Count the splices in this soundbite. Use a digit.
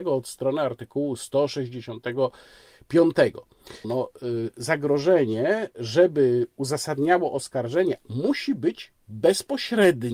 2